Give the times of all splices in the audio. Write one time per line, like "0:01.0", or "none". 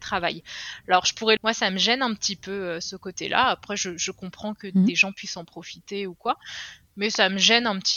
0:01.4